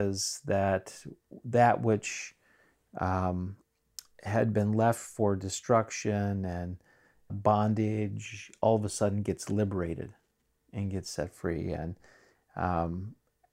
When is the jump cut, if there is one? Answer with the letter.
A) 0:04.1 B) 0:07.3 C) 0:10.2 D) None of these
B